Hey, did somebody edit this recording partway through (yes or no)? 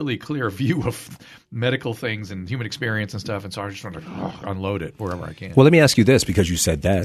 no